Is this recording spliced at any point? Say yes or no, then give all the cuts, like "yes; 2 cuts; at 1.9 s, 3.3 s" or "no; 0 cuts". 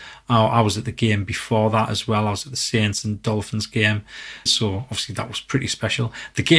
yes; 1 cut; at 4.5 s